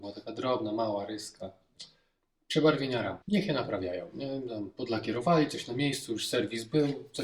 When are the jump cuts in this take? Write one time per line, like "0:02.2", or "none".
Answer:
0:03.2